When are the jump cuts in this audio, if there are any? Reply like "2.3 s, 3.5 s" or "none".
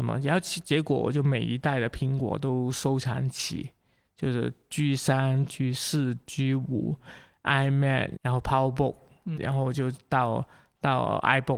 8.2 s, 9.4 s